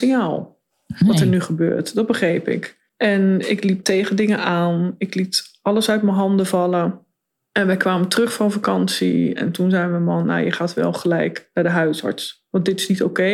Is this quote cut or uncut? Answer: uncut